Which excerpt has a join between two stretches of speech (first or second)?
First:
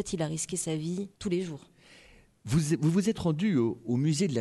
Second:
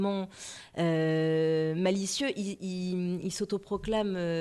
first